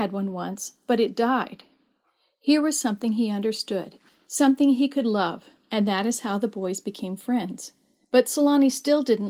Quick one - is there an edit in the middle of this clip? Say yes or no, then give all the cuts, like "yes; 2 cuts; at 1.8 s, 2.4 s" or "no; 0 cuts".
no; 0 cuts